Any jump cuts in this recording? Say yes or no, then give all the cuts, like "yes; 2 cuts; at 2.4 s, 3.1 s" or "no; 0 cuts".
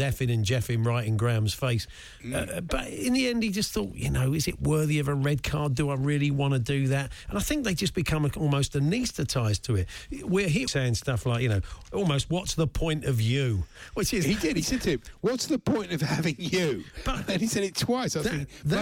yes; 1 cut; at 10.7 s